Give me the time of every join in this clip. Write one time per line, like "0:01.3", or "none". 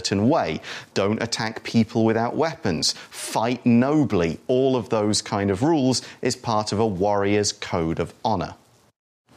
0:00.9